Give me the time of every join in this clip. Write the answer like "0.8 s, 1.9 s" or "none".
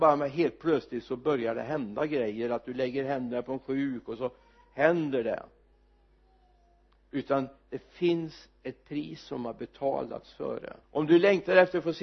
10.8 s